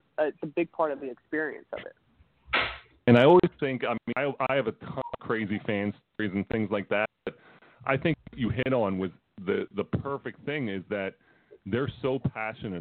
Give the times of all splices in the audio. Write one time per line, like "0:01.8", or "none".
none